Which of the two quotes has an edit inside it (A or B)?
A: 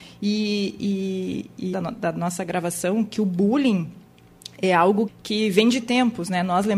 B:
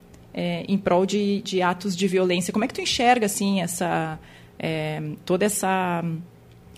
A